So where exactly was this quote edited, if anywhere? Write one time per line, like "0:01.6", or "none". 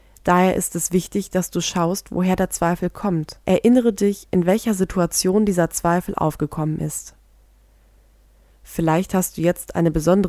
0:03.4